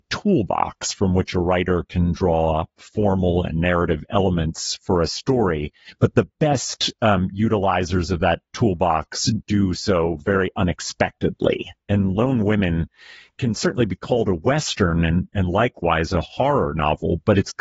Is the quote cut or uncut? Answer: uncut